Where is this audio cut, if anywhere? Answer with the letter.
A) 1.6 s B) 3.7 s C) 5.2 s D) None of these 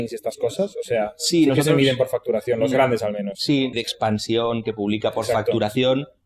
B